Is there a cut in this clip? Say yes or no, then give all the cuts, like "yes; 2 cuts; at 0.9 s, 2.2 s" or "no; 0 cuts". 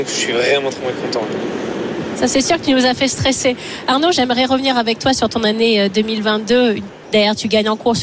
yes; 1 cut; at 7.0 s